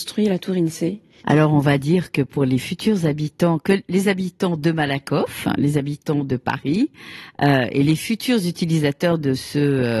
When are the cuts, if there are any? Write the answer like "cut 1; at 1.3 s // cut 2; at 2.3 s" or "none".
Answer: cut 1; at 1.2 s